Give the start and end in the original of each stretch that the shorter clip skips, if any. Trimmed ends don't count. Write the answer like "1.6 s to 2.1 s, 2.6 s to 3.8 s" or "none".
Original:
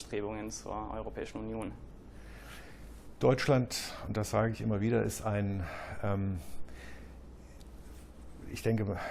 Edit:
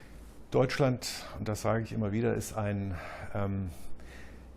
none

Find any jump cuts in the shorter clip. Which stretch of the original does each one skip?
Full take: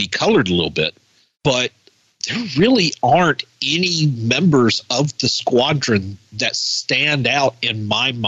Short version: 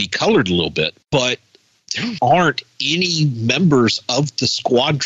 1.0 s to 1.3 s, 2.5 s to 3.0 s

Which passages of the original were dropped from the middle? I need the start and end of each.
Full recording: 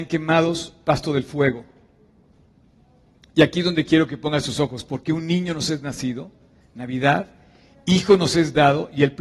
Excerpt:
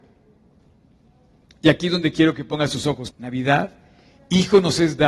4.8 s to 6.7 s

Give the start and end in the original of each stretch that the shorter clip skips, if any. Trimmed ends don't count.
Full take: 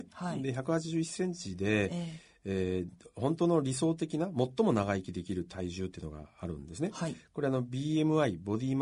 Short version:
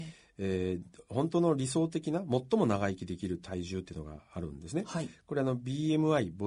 none

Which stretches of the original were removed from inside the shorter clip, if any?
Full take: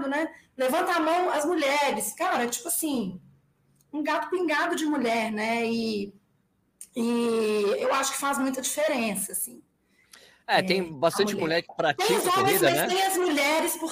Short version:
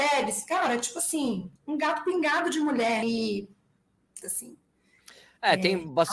3.2 s to 3.8 s, 5.3 s to 5.7 s, 6.9 s to 9.3 s

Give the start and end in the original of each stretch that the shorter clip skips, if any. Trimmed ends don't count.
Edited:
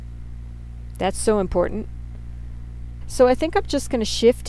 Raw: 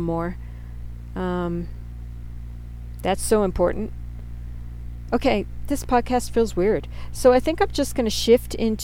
5.0 s to 7.1 s

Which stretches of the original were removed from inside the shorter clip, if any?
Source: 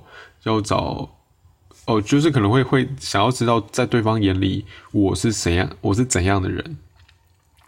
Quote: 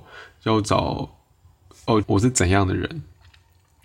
2.0 s to 5.8 s

